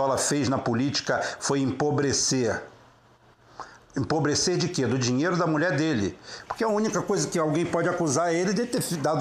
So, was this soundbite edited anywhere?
no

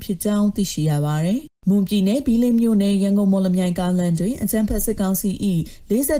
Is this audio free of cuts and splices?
no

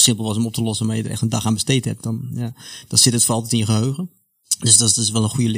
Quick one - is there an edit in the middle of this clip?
no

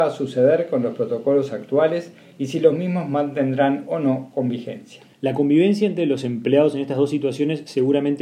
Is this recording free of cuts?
no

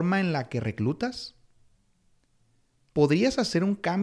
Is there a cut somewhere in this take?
no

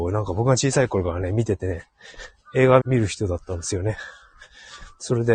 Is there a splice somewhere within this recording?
yes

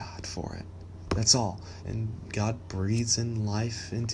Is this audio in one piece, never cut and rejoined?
no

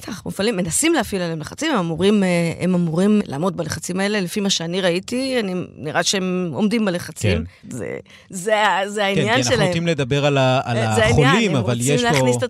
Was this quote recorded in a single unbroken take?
no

